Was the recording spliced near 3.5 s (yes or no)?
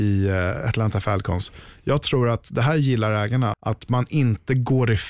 yes